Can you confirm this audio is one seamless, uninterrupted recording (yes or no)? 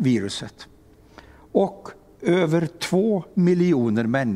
yes